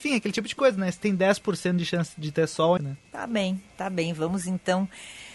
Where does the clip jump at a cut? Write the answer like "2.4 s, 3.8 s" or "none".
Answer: 2.8 s